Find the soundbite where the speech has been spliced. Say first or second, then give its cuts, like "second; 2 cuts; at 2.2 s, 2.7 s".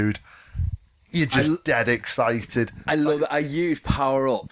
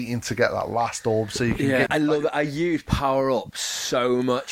second; 1 cut; at 1.9 s